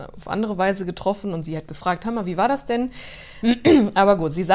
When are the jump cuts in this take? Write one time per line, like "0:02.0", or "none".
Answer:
0:03.4